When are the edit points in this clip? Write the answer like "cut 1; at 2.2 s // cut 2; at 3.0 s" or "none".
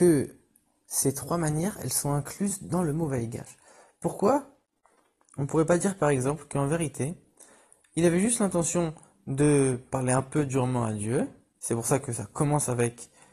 none